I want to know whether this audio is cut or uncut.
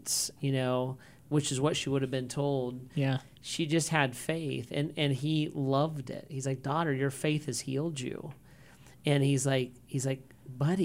uncut